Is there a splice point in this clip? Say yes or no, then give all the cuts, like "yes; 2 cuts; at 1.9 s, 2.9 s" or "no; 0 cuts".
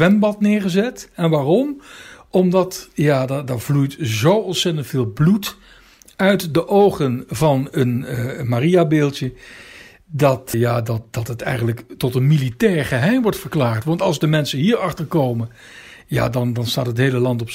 yes; 1 cut; at 10.5 s